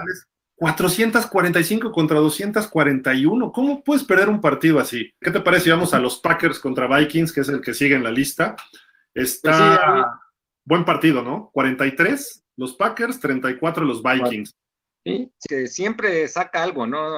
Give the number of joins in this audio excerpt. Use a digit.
2